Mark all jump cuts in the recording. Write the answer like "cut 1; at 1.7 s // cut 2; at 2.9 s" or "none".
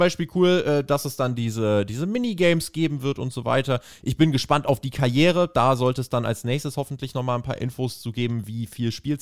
none